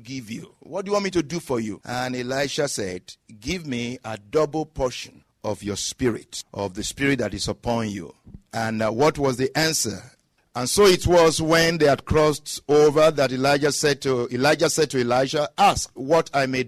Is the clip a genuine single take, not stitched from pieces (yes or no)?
yes